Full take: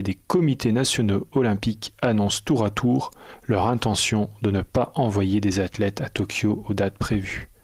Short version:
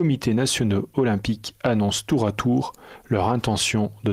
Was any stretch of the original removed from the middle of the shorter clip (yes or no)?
no